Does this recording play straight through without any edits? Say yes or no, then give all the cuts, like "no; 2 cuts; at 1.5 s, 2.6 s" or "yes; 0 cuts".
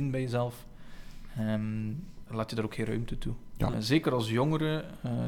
no; 2 cuts; at 2.3 s, 3.7 s